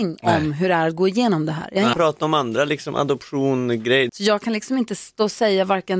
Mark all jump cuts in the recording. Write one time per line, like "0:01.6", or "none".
0:01.9
0:04.1